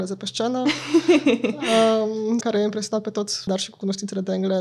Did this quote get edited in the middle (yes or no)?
yes